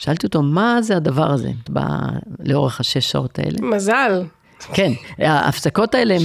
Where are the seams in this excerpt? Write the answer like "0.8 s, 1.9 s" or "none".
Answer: 1.7 s